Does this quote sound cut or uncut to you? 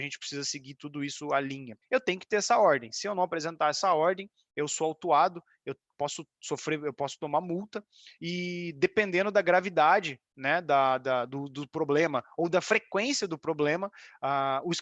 cut